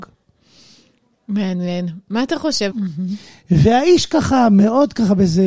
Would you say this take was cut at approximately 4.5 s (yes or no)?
no